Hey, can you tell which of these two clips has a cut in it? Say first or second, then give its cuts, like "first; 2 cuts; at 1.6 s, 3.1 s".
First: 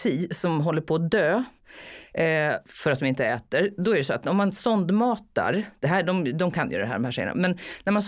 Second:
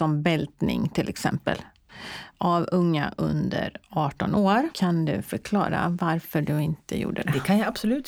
second; 1 cut; at 4.7 s